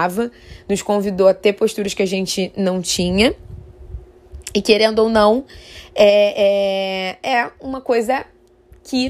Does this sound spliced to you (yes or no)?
no